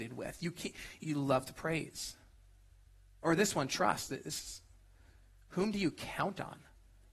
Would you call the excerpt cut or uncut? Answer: cut